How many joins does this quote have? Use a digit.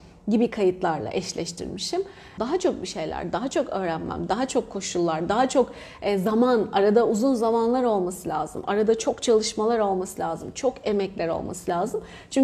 1